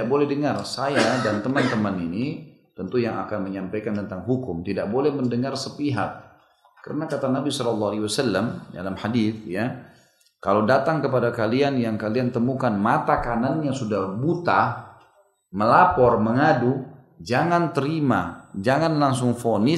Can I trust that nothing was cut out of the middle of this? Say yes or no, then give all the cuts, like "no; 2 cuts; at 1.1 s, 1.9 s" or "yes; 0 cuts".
yes; 0 cuts